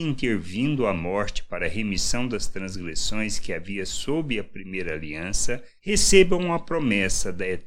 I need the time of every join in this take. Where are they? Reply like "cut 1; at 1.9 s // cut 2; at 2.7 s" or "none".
cut 1; at 5.8 s